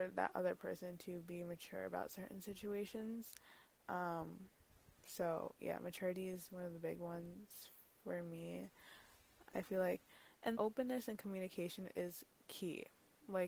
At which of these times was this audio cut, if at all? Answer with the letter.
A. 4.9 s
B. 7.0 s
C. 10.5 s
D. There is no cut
C